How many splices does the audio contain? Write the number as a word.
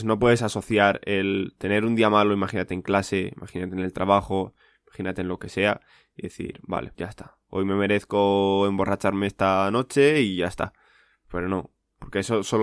one